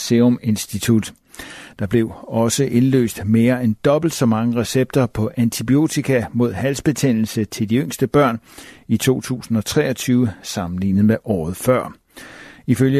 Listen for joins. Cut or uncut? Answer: uncut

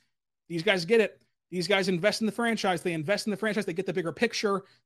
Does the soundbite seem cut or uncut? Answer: uncut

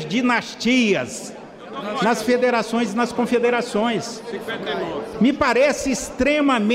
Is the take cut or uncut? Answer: uncut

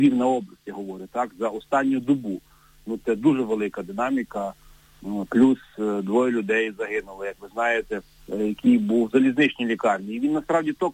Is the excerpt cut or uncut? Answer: cut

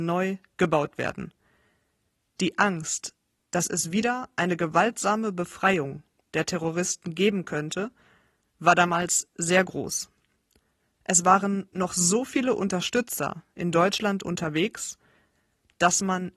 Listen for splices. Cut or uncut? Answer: uncut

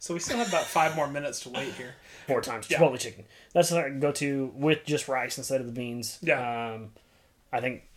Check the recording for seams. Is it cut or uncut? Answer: cut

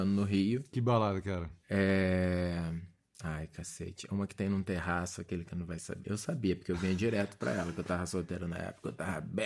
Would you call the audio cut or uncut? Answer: cut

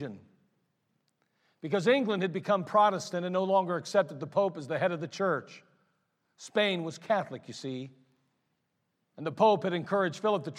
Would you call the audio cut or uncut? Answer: uncut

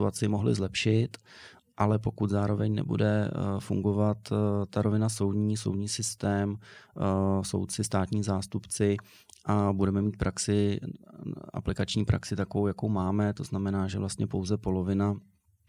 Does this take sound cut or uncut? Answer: uncut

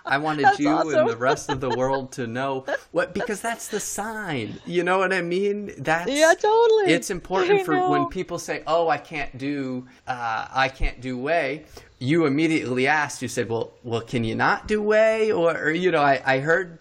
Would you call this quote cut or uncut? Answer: cut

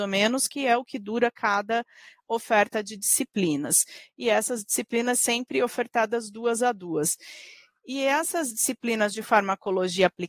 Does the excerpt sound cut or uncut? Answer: uncut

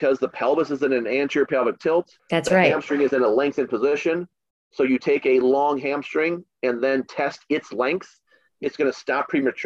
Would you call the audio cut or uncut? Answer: cut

